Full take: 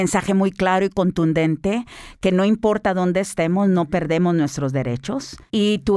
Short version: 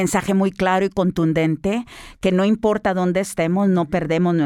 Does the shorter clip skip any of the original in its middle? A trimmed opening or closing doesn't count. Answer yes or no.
no